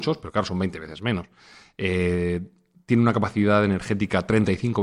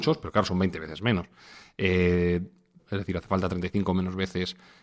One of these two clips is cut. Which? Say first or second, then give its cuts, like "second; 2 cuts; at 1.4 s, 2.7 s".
second; 1 cut; at 2.8 s